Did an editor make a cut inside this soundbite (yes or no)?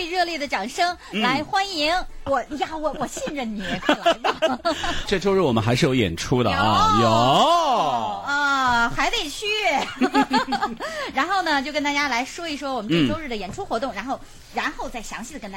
yes